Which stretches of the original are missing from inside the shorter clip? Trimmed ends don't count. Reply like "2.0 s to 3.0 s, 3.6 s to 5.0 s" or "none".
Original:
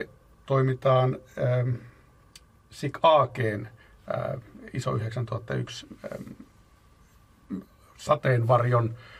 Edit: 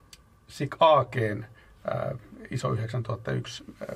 none